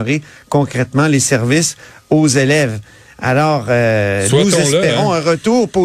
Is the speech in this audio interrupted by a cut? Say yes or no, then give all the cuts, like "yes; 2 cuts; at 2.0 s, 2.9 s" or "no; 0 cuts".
no; 0 cuts